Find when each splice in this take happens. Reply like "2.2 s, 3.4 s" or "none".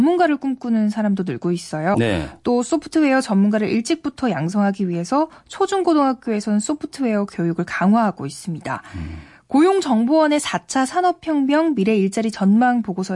1.9 s